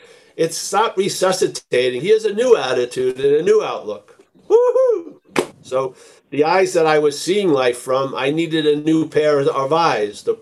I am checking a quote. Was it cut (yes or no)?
yes